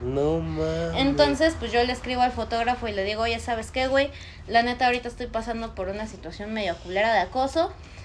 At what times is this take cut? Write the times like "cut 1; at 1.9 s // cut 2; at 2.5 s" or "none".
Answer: none